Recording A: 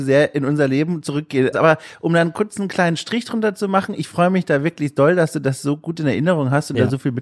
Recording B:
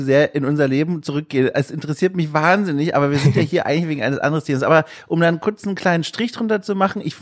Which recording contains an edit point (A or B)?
A